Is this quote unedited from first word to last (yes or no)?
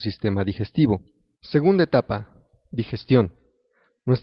no